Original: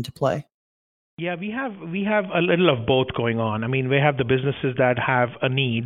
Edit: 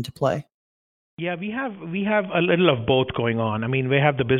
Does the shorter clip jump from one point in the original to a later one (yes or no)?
no